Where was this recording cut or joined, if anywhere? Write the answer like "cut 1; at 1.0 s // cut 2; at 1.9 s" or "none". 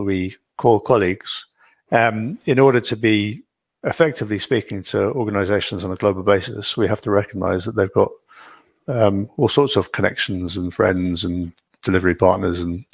none